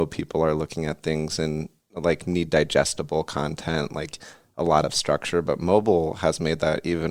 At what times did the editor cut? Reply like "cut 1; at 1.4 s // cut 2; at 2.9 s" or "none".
none